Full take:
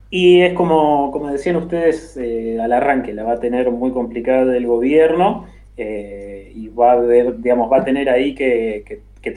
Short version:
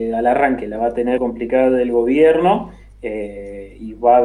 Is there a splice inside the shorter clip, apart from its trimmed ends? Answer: yes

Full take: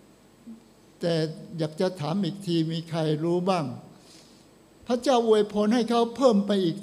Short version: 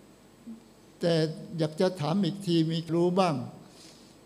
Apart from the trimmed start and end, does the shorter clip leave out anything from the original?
yes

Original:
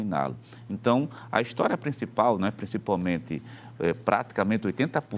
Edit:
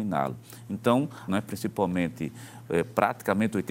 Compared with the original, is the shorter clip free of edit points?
no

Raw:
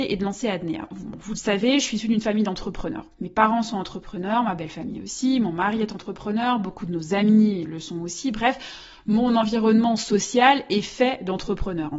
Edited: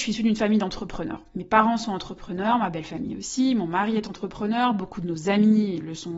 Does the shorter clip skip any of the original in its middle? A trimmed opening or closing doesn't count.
no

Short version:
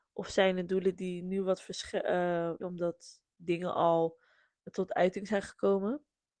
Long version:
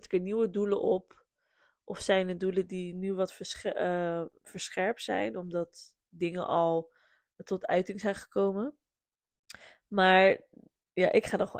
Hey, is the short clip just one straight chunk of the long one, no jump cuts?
no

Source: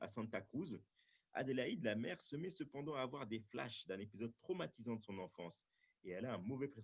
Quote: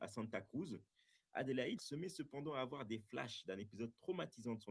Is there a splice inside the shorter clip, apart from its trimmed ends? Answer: yes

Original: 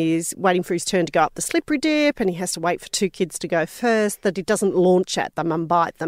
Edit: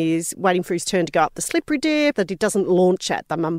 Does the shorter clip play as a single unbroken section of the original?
no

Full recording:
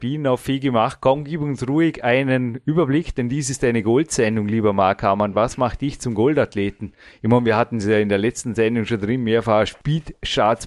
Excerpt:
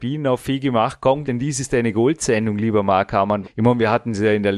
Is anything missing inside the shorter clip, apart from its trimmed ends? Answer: yes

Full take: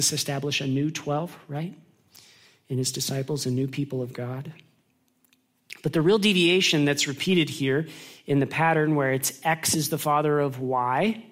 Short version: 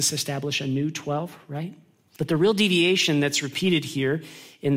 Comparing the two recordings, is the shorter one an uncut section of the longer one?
no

